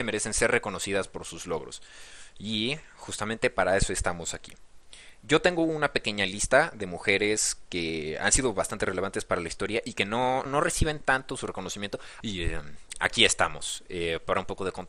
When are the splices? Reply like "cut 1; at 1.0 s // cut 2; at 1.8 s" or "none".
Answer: cut 1; at 10.5 s // cut 2; at 12.2 s